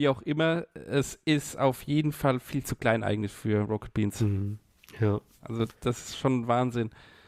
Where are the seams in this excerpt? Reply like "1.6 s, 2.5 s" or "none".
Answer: none